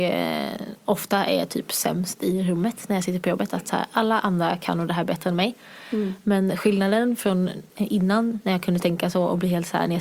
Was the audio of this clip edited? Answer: yes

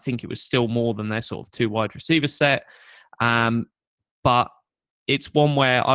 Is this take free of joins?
yes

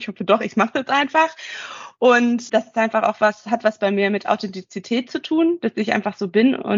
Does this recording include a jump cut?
yes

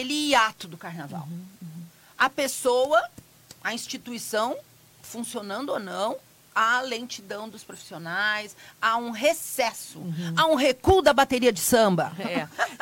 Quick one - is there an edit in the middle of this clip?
no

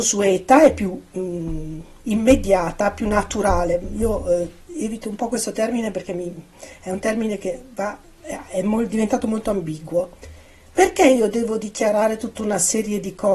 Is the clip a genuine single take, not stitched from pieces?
yes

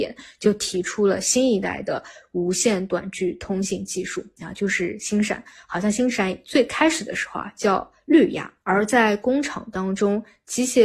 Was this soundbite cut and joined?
yes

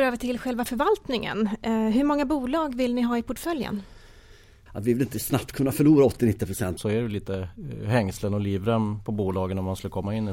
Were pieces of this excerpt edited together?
yes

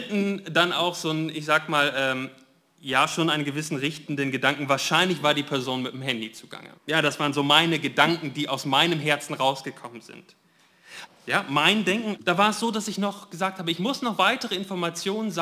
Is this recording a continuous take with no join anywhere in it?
no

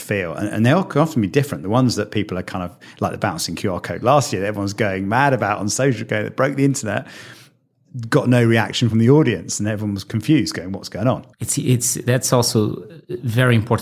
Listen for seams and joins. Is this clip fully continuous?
no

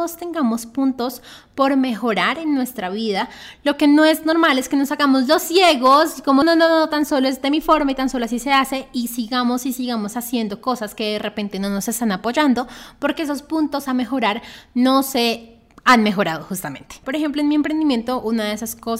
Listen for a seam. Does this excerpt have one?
yes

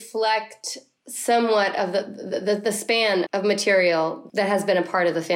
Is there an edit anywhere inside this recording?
yes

